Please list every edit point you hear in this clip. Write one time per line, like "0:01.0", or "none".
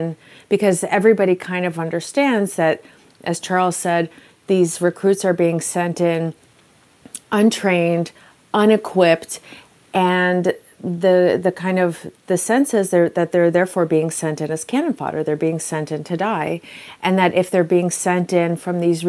none